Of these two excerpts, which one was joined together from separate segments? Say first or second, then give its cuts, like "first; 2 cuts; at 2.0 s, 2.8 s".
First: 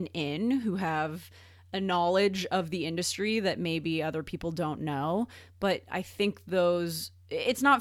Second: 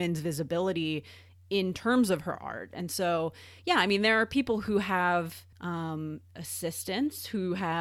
second; 1 cut; at 5.5 s